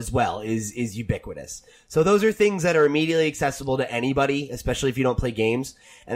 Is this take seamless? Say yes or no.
yes